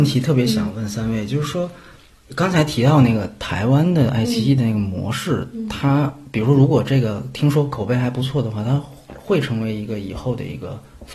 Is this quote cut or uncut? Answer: uncut